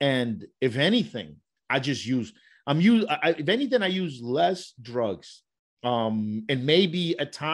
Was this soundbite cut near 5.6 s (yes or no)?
no